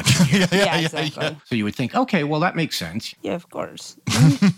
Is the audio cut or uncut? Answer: cut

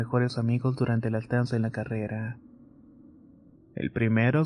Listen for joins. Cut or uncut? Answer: cut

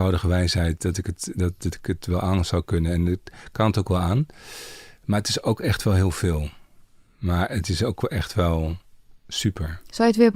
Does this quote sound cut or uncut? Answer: uncut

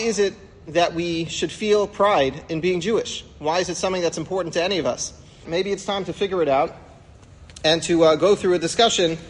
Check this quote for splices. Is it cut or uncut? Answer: cut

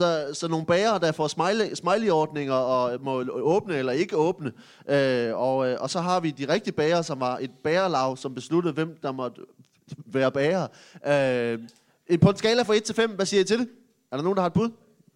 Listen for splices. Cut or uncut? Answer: uncut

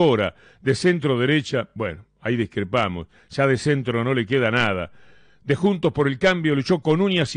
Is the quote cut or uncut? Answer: uncut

